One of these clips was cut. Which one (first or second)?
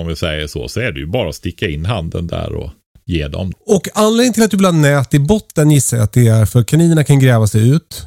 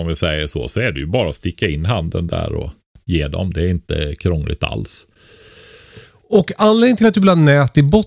first